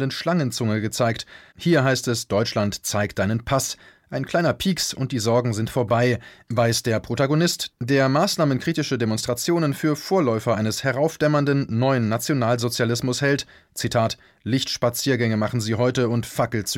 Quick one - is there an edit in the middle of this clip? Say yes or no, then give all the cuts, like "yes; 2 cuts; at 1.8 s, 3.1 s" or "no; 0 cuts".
yes; 1 cut; at 1.5 s